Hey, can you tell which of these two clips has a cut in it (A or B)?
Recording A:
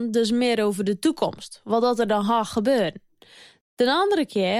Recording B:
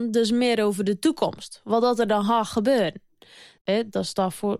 B